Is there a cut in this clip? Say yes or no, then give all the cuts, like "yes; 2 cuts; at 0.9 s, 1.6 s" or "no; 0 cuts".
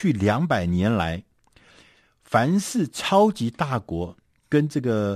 no; 0 cuts